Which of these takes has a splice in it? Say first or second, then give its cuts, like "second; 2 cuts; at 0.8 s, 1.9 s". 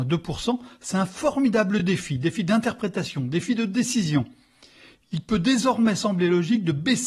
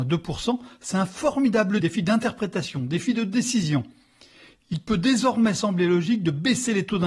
second; 1 cut; at 1.8 s